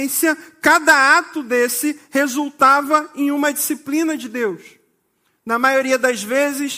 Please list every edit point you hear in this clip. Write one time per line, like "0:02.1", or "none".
none